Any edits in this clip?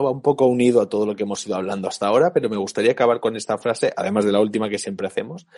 no; 0 cuts

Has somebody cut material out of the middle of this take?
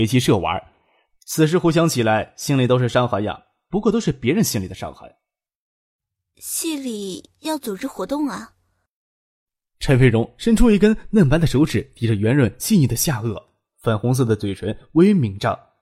no; 0 cuts

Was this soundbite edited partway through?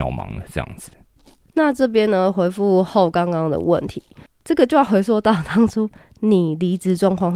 yes; 1 cut; at 1.4 s

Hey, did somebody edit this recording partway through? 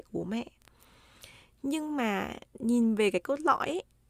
no; 0 cuts

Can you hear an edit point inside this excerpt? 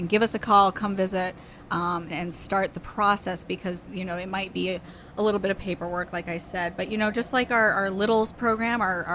yes; 1 cut; at 2.1 s

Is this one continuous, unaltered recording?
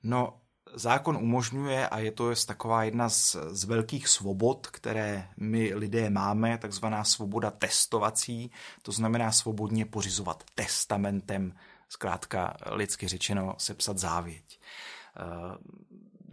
yes; 0 cuts

